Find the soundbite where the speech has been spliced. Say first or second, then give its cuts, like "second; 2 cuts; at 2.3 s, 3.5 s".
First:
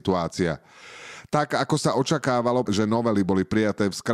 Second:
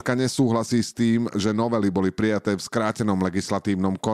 first; 1 cut; at 2.7 s